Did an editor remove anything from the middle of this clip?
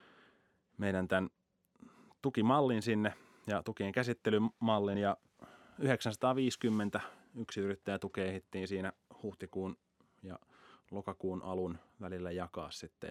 no; 0 cuts

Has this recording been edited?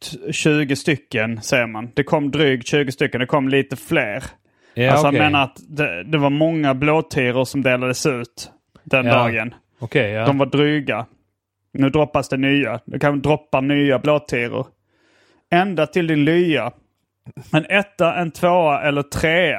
no; 0 cuts

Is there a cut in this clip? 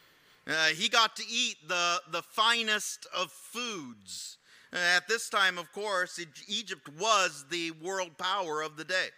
no; 0 cuts

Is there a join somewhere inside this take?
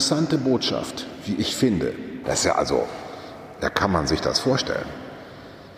yes; 1 cut; at 2.2 s

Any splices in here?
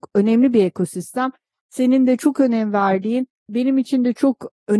no; 0 cuts

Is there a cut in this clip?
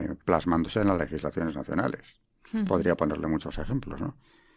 no; 0 cuts

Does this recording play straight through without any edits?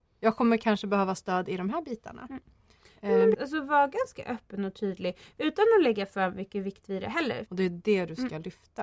no; 2 cuts; at 3.3 s, 7.5 s

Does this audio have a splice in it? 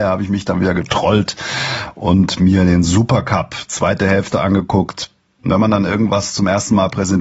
yes; 1 cut; at 5.4 s

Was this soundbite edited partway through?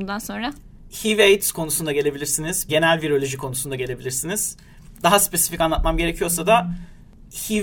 yes; 1 cut; at 2.7 s

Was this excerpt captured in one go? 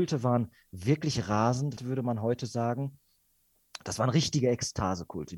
no; 1 cut; at 1.8 s

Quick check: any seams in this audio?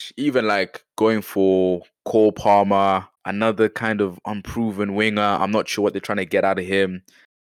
yes; 1 cut; at 3.1 s

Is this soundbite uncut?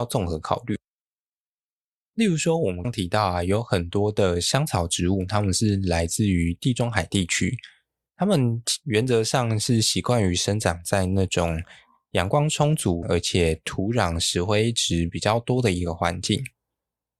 no; 2 cuts; at 2.8 s, 13.0 s

